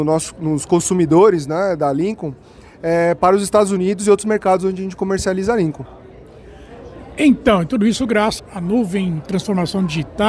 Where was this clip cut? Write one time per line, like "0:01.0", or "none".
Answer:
0:08.4